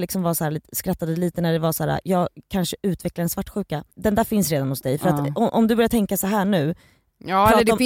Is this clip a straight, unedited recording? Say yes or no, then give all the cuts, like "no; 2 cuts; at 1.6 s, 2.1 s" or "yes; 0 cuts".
no; 1 cut; at 3.9 s